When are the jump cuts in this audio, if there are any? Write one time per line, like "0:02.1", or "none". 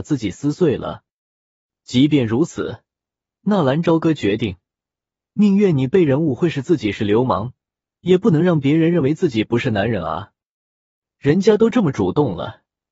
none

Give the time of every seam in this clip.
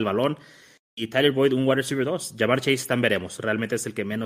none

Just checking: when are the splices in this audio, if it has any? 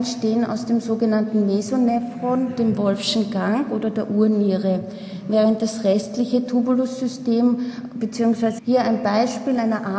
0:08.6

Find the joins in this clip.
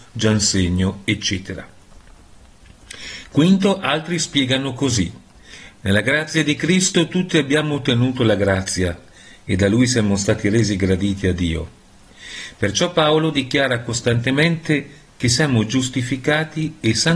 none

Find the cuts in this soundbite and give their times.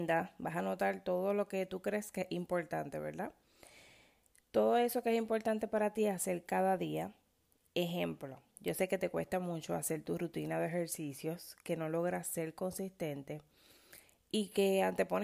none

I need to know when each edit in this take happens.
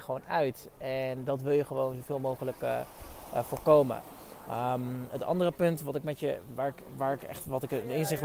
none

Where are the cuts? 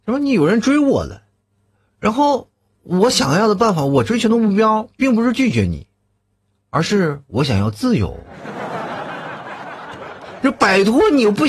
none

